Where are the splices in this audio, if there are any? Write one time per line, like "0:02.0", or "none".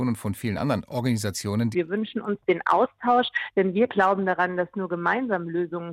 0:01.7